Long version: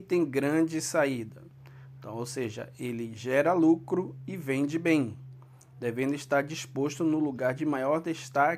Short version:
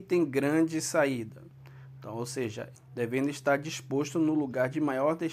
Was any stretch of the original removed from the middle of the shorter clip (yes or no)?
yes